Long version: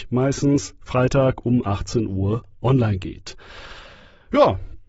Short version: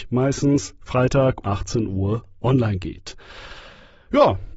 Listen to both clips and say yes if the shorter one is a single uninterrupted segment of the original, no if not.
no